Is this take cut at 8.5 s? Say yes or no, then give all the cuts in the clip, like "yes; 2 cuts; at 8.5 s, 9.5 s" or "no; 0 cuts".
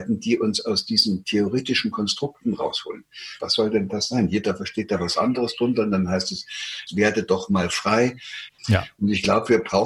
yes; 3 cuts; at 3.4 s, 6.9 s, 8.5 s